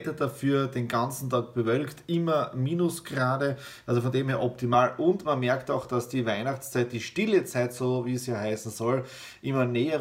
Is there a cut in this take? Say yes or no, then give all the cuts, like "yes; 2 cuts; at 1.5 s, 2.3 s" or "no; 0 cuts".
no; 0 cuts